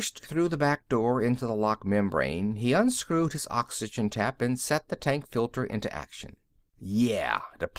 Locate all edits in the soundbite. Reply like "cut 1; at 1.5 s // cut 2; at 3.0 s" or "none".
cut 1; at 6.7 s